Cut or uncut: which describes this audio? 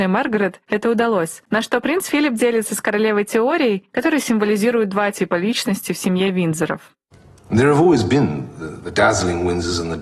cut